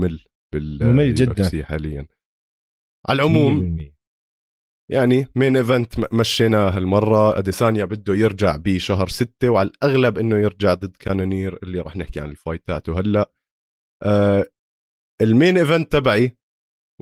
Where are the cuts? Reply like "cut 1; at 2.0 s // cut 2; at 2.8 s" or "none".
none